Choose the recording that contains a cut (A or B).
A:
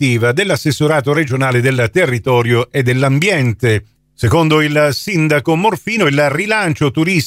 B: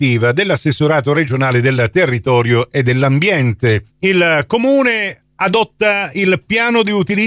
B